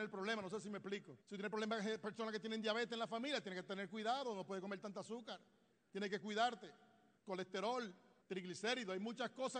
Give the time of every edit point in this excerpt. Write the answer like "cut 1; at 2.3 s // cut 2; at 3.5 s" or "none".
cut 1; at 1.2 s